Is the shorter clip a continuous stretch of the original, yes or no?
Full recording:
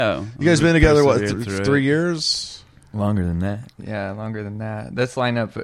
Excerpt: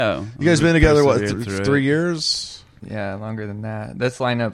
no